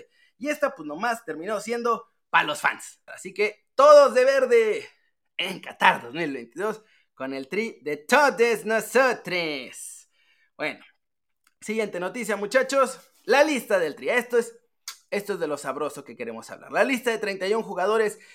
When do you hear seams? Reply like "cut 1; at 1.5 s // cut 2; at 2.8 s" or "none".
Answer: cut 1; at 3.1 s